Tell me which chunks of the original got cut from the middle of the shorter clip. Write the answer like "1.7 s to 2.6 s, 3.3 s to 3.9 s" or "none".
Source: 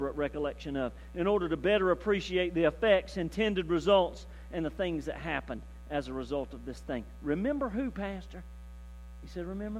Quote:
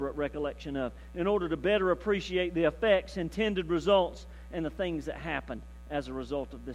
none